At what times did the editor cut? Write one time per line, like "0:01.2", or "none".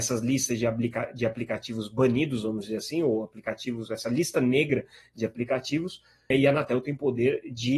0:06.3